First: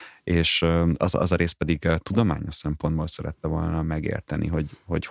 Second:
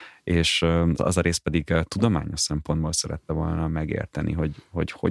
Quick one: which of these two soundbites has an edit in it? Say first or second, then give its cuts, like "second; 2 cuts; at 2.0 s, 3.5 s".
second; 1 cut; at 1.0 s